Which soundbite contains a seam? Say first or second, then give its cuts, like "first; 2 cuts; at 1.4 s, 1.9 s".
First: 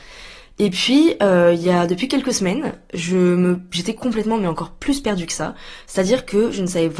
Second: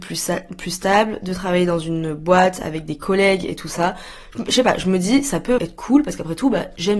second; 1 cut; at 5.6 s